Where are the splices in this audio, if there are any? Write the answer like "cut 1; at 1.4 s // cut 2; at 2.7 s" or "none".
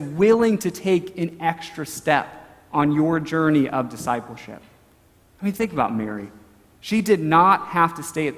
none

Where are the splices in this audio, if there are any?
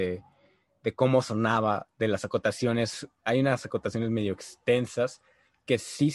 none

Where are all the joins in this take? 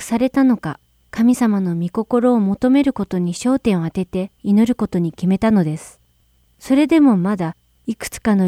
cut 1; at 6.4 s

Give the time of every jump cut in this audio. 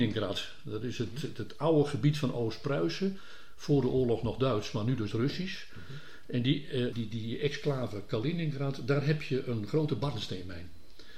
cut 1; at 6.9 s

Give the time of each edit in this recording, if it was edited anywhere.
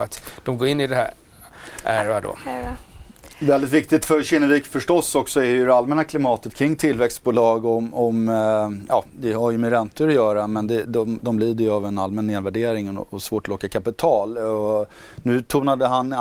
none

